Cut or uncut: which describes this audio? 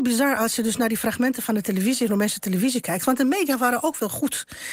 uncut